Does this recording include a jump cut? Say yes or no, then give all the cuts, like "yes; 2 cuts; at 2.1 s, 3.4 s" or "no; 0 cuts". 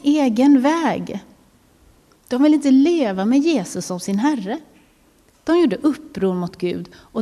no; 0 cuts